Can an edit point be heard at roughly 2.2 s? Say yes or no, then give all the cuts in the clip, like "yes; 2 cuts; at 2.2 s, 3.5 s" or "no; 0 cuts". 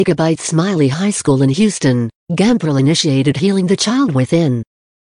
yes; 1 cut; at 2.2 s